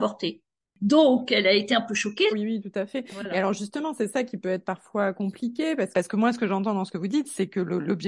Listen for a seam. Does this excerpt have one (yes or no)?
yes